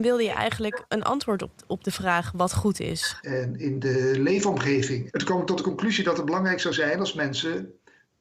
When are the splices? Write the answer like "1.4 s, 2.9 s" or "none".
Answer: 3.2 s, 5.1 s